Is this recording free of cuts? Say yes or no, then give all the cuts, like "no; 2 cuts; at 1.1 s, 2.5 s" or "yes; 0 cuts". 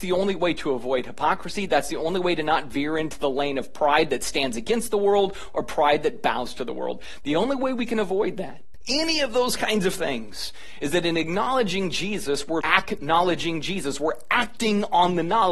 no; 1 cut; at 12.6 s